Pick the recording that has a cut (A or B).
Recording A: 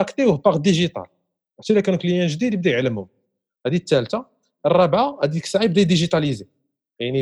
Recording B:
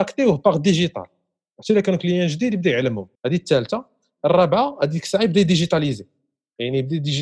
B